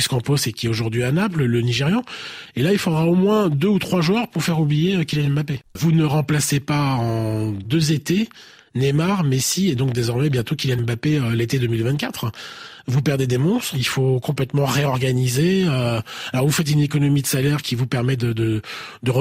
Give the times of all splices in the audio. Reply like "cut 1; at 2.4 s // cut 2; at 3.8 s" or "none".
cut 1; at 5.8 s